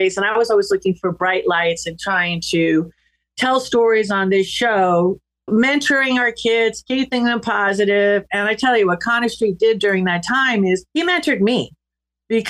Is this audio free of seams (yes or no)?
no